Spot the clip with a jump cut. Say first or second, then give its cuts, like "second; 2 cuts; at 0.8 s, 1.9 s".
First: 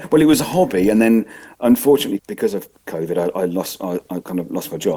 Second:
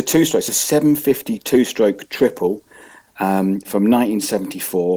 first; 1 cut; at 2.2 s